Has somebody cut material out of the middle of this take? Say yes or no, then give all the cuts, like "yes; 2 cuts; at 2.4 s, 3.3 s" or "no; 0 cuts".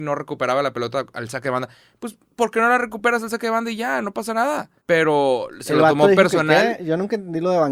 yes; 1 cut; at 4.8 s